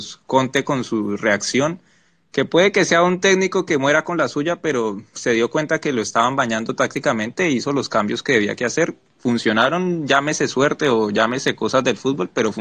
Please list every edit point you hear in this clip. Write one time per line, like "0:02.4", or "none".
none